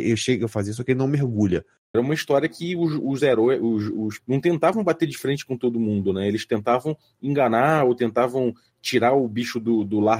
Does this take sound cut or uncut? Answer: cut